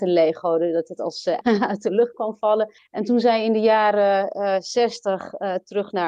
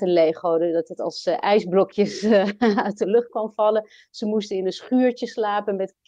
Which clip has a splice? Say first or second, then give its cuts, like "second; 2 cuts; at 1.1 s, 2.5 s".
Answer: first; 2 cuts; at 1.4 s, 2.8 s